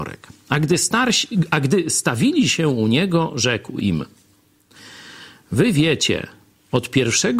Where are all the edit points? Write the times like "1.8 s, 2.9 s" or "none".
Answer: none